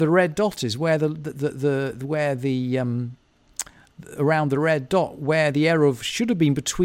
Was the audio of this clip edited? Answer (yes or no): no